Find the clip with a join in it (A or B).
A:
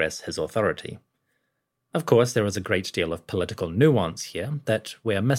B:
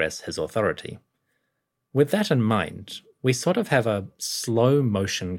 B